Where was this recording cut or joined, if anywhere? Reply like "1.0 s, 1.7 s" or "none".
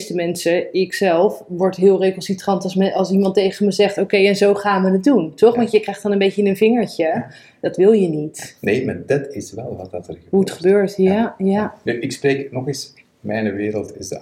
none

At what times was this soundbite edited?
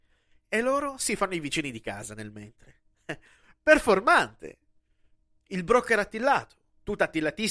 none

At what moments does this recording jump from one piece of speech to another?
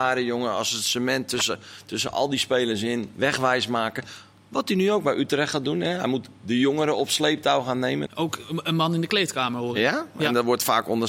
8.1 s

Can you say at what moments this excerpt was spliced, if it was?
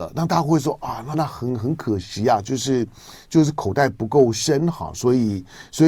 1.1 s

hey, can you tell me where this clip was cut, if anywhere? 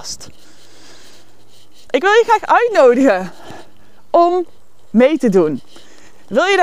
none

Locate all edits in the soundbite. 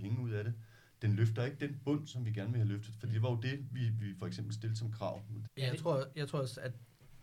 5.5 s

